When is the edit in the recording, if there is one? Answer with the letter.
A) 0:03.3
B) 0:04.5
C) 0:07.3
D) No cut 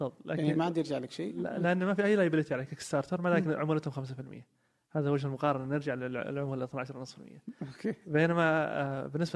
D